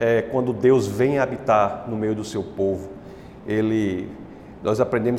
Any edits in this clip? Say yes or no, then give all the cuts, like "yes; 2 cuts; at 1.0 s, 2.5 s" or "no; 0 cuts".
no; 0 cuts